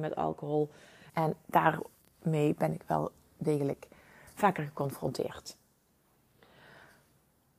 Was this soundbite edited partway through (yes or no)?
yes